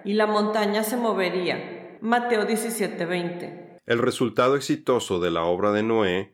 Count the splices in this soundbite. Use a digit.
2